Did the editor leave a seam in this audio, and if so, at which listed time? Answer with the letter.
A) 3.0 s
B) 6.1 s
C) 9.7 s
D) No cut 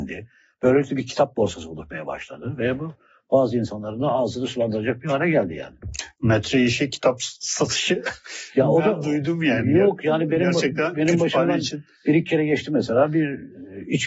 D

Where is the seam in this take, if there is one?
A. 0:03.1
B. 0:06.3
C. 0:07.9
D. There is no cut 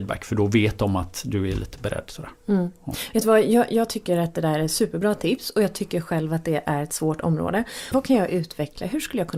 C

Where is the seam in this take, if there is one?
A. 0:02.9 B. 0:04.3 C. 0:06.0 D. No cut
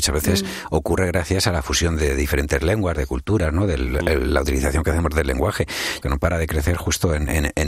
C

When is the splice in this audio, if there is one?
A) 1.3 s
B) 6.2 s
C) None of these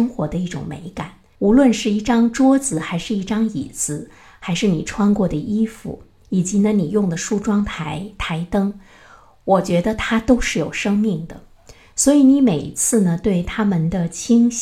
A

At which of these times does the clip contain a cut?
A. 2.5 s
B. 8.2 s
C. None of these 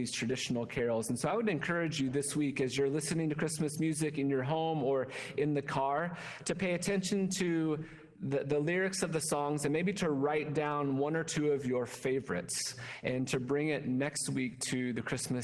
C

